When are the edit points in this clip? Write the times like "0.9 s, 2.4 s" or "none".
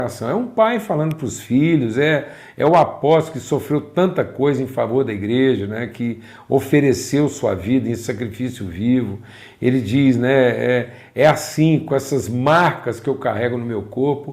none